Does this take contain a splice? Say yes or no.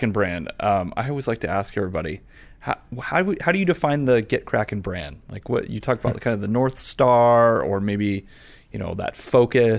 no